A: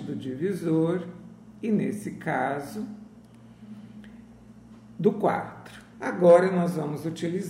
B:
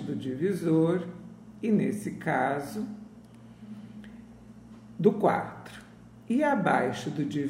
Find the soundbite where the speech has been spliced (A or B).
A